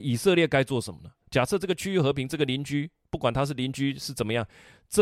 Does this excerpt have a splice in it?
yes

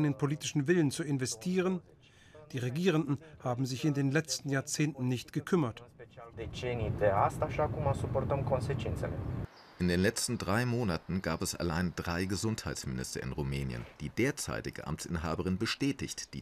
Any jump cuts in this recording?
yes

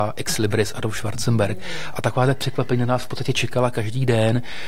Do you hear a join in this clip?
no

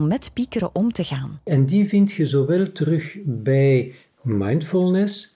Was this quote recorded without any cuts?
no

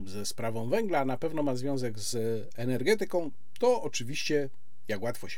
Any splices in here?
no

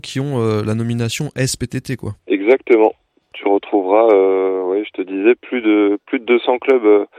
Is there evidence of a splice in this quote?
yes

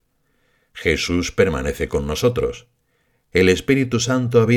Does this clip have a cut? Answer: no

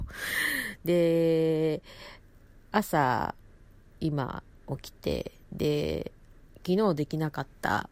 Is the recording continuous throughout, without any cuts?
yes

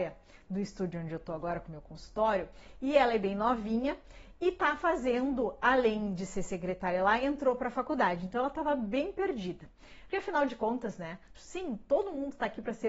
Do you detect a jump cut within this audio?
yes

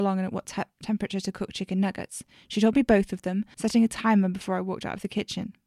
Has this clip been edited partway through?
yes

